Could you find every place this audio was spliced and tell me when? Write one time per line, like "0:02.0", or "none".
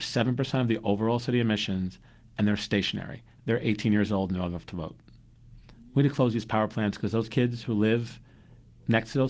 0:03.4